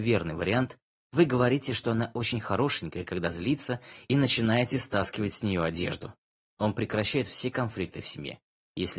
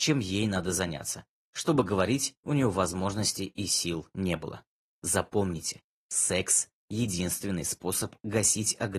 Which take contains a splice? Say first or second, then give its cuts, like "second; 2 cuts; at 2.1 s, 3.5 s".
first; 1 cut; at 6.5 s